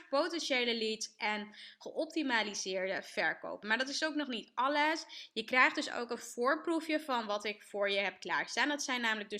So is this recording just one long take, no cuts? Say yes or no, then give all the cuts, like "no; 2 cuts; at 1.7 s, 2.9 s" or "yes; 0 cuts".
yes; 0 cuts